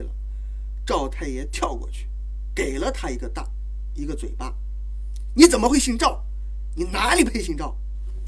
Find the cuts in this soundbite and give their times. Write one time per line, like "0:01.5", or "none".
none

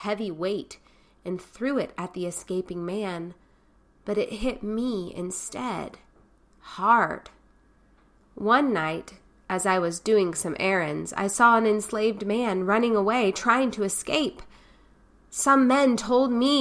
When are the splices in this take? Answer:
0:08.2

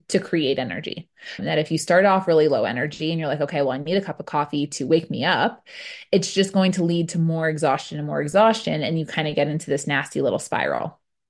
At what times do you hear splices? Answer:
0:01.4

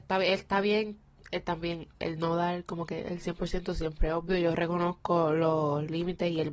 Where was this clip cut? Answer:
none

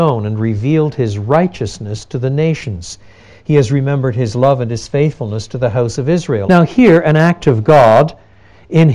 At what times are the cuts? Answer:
0:06.4

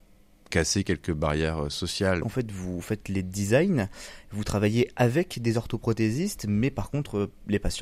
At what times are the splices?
0:02.2

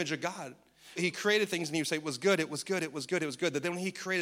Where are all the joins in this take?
0:01.0

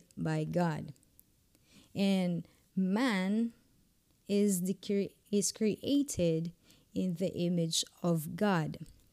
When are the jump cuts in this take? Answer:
none

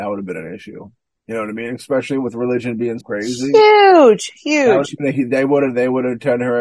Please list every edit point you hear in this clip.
0:03.0

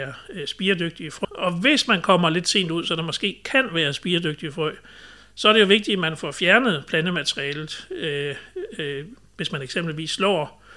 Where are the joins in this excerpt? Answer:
0:01.2

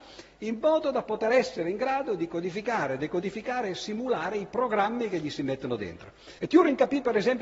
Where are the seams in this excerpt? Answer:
0:06.4

